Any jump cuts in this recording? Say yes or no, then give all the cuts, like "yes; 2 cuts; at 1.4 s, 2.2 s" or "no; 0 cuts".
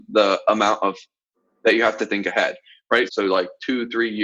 yes; 1 cut; at 3.1 s